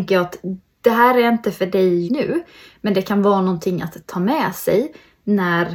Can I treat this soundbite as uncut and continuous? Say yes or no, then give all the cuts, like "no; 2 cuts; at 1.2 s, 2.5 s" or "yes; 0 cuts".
no; 1 cut; at 2.1 s